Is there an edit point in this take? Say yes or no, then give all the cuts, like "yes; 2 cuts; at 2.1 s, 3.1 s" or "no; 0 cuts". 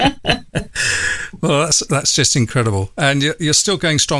no; 0 cuts